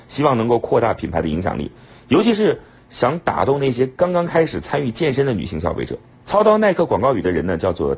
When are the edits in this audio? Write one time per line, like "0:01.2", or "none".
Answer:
none